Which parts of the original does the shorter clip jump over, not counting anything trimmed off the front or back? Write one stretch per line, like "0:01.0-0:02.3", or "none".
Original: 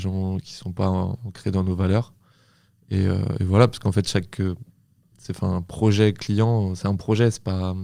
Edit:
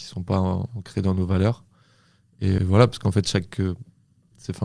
0:03.1-0:03.4